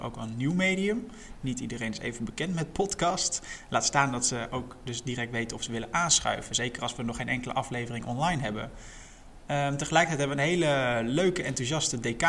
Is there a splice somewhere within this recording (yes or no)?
no